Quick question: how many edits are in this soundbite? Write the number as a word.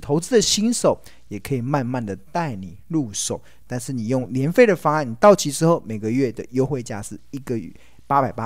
one